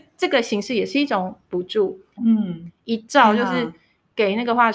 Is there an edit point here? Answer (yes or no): yes